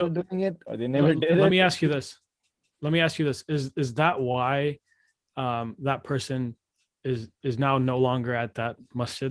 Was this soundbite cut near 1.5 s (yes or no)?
no